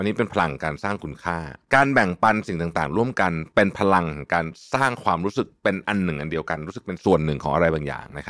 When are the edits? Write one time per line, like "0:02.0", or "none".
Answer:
0:07.0